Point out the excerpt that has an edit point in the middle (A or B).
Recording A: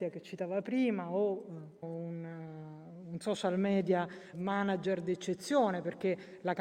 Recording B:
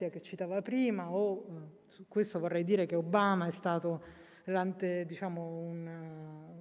A